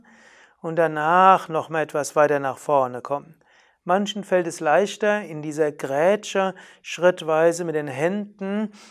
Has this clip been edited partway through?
no; 0 cuts

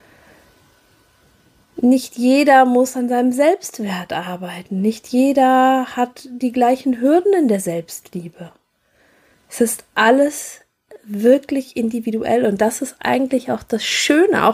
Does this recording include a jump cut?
no; 0 cuts

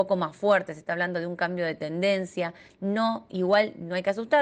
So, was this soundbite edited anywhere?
no; 0 cuts

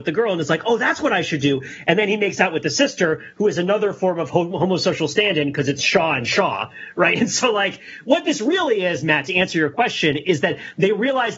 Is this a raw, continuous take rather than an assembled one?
yes; 0 cuts

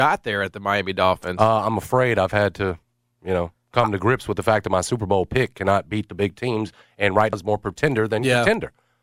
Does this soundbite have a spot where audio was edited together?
yes; 1 cut; at 7.3 s

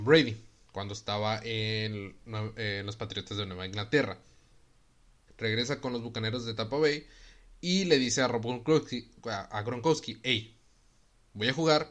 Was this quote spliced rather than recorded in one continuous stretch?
yes; 1 cut; at 5.3 s

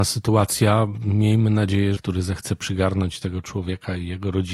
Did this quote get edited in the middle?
yes; 1 cut; at 2.0 s

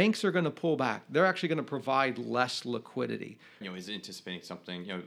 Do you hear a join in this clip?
yes; 1 cut; at 3.6 s

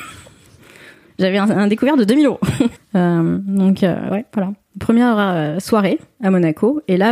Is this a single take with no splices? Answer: no; 1 cut; at 2.8 s

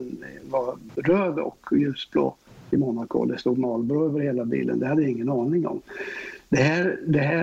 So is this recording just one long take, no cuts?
yes; 0 cuts

